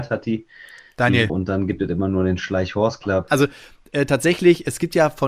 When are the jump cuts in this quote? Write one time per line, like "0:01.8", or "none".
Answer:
0:01.3
0:03.3